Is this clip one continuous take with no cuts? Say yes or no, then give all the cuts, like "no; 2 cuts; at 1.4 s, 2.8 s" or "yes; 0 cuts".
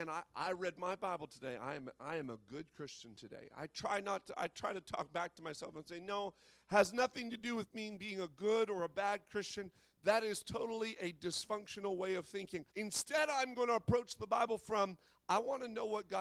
no; 1 cut; at 12.7 s